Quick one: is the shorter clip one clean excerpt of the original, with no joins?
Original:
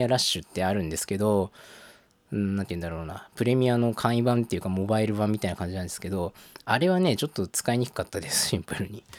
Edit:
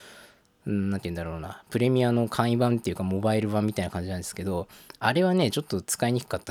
yes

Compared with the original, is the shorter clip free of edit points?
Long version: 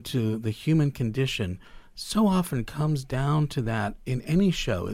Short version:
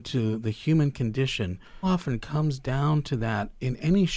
no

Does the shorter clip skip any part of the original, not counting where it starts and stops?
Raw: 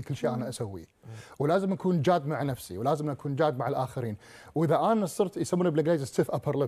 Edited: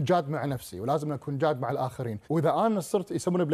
yes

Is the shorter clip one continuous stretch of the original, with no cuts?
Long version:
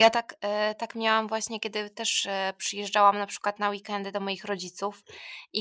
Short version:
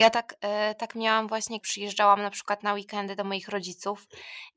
no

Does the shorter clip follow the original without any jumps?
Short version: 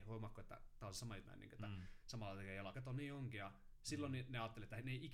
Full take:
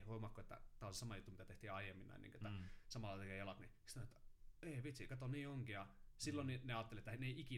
no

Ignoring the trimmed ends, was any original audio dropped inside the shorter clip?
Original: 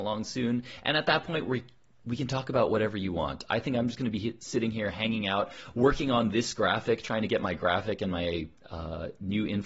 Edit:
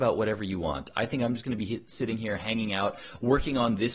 no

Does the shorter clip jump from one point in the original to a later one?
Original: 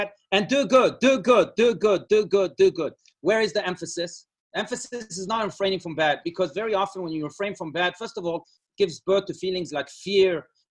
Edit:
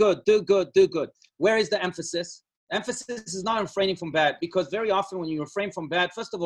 no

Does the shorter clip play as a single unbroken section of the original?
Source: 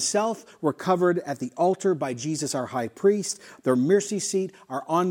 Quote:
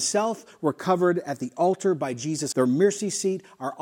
no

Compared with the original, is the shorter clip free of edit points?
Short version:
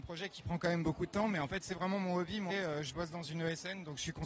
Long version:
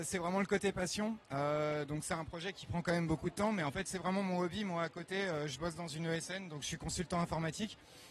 no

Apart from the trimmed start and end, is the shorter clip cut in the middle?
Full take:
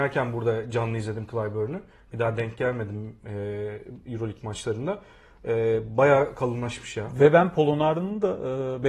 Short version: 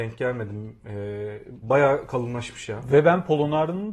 yes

